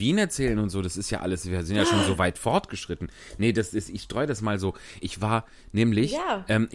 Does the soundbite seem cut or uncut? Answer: cut